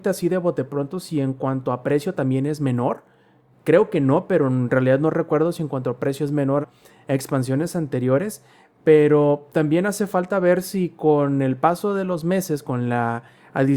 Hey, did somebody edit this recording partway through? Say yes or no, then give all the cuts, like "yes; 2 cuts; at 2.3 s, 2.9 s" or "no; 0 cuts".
yes; 1 cut; at 6.6 s